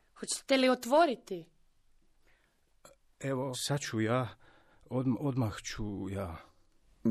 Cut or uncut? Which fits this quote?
cut